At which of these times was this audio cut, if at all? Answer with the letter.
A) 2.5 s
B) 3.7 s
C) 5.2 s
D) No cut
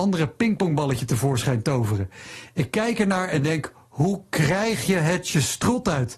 D